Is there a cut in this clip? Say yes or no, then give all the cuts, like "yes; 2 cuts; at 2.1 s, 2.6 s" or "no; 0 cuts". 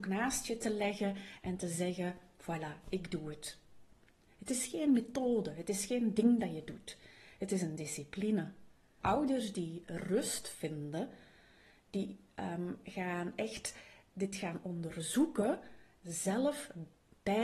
yes; 1 cut; at 9.0 s